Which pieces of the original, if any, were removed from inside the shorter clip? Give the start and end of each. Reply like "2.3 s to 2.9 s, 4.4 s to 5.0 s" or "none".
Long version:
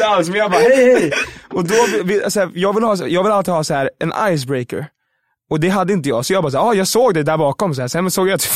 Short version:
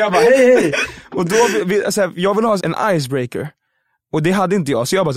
3.0 s to 4.0 s